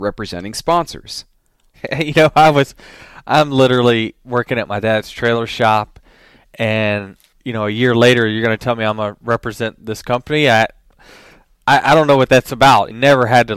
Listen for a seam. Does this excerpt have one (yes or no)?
yes